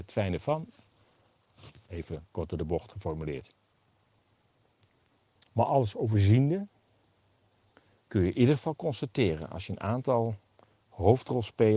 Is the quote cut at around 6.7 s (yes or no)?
no